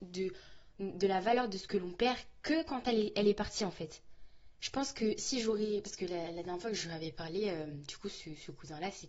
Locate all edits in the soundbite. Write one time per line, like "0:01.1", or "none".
none